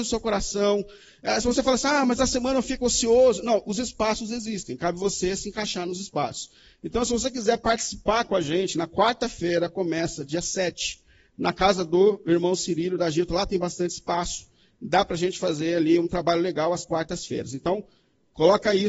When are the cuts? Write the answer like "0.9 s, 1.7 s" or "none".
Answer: none